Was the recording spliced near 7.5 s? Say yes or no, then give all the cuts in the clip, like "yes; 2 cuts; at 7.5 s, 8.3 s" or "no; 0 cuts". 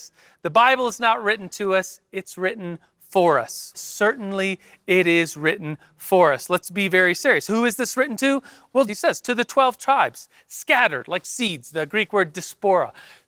no; 2 cuts; at 3.7 s, 8.9 s